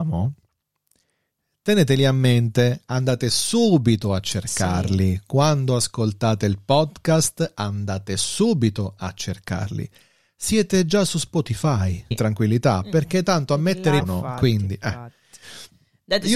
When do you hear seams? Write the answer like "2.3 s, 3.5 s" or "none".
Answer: 12.1 s, 14.0 s